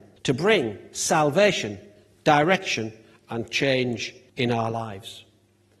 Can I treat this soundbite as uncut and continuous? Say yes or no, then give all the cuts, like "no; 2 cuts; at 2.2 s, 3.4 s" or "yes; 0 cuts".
yes; 0 cuts